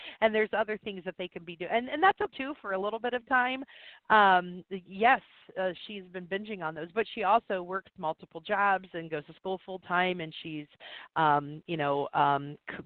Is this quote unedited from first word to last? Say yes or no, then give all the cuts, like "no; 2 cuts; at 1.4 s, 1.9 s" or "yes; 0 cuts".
no; 1 cut; at 4.0 s